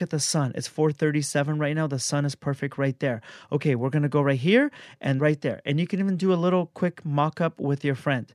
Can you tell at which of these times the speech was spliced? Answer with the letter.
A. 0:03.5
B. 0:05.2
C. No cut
B